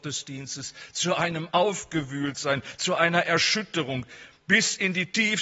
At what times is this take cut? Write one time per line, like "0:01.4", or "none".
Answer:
none